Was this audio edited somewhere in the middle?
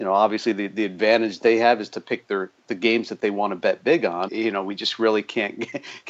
yes; 1 cut; at 4.3 s

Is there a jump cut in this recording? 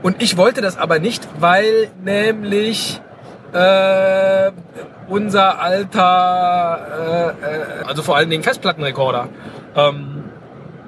yes; 1 cut; at 7.8 s

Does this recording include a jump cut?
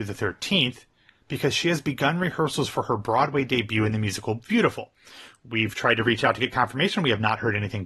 no; 0 cuts

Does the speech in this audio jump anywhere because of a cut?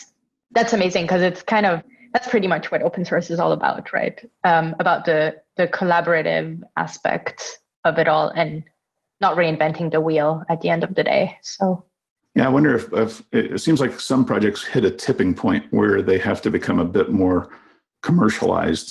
no; 0 cuts

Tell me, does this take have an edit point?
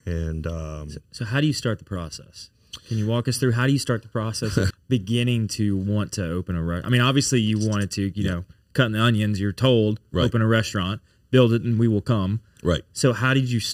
yes; 1 cut; at 4.7 s

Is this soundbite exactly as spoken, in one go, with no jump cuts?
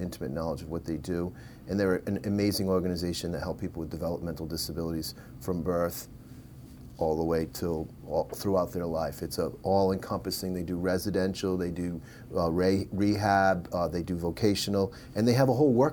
yes; 0 cuts

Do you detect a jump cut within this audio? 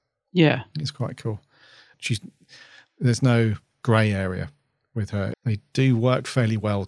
yes; 2 cuts; at 1.9 s, 5.3 s

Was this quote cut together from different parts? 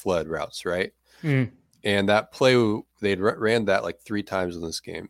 no; 0 cuts

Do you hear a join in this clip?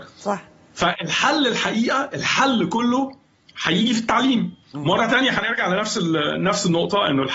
yes; 1 cut; at 4.6 s

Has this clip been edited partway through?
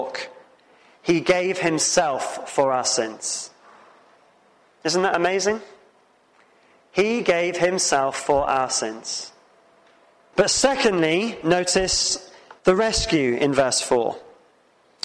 yes; 2 cuts; at 10.3 s, 12.6 s

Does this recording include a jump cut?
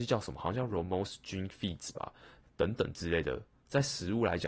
yes; 1 cut; at 2.4 s

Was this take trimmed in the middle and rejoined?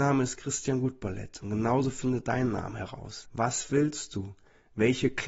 yes; 1 cut; at 3.2 s

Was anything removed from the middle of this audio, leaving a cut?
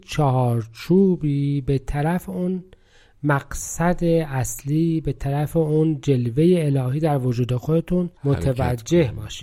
yes; 1 cut; at 8.2 s

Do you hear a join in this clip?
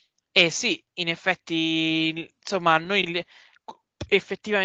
no; 0 cuts

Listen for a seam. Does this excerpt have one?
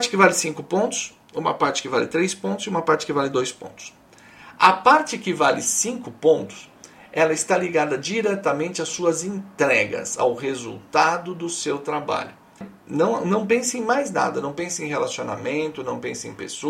yes; 1 cut; at 12.6 s

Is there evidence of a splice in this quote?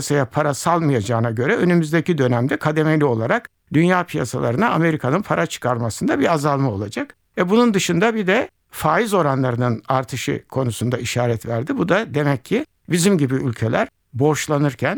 no; 0 cuts

